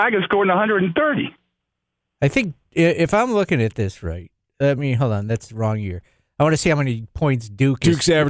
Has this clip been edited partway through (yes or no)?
no